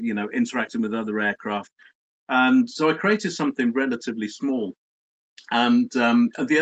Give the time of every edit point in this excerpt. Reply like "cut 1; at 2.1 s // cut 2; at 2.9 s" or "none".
none